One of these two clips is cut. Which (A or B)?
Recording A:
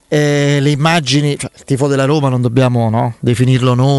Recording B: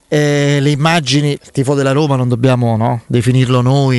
B